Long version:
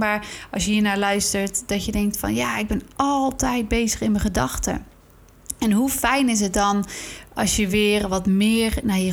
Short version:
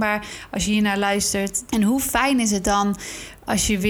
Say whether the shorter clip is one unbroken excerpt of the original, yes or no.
no